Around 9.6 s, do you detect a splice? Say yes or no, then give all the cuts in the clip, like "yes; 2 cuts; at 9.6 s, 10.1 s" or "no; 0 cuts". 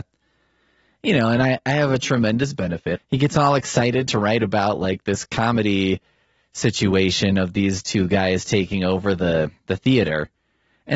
yes; 2 cuts; at 3.0 s, 9.6 s